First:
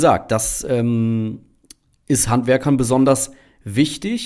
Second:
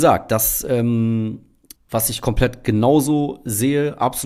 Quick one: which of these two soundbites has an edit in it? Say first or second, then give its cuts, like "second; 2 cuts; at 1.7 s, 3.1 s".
second; 1 cut; at 1.8 s